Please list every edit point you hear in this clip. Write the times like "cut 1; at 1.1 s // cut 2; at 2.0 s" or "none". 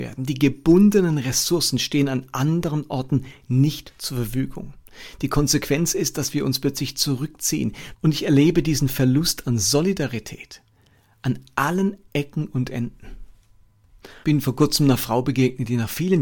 cut 1; at 7.9 s // cut 2; at 14.2 s